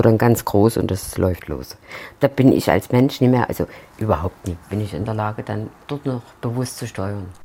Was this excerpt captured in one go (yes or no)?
no